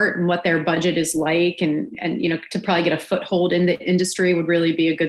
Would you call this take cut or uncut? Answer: uncut